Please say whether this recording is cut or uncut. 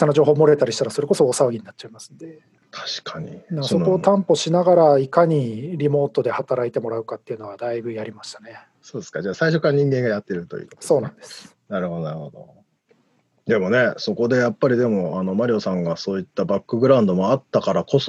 cut